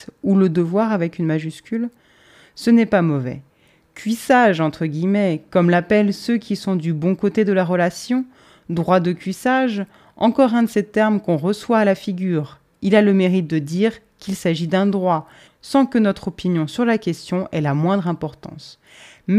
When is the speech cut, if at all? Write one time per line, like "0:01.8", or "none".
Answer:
0:15.5

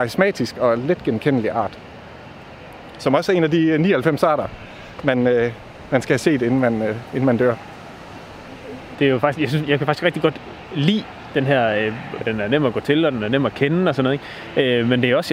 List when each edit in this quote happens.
0:08.9
0:12.2

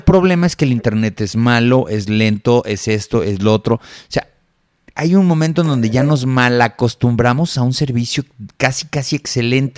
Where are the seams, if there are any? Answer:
none

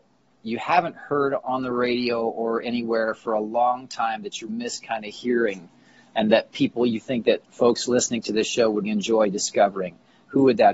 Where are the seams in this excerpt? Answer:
0:04.5
0:08.9

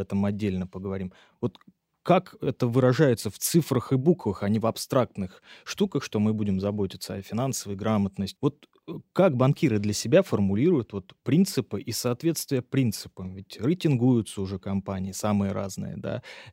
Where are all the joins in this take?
0:08.4

